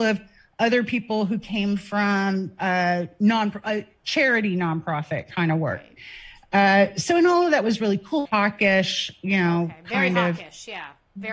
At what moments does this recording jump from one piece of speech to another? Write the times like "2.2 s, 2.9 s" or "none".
8.3 s